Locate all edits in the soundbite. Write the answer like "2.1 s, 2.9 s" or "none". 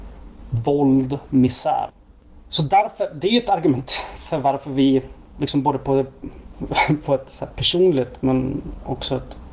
none